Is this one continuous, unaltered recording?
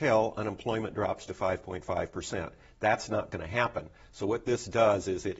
yes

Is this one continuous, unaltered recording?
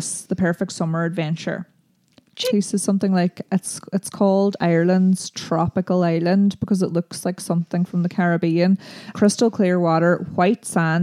no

